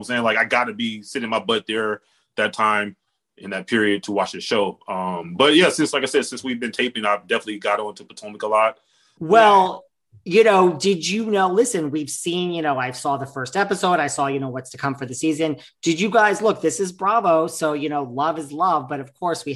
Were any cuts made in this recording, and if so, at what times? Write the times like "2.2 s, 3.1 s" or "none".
9.2 s